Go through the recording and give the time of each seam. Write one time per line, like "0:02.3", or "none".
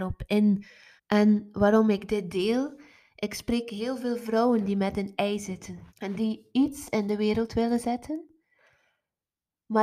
0:01.0
0:05.9